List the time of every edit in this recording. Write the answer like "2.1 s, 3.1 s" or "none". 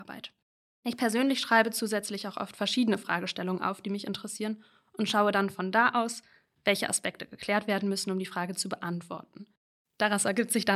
none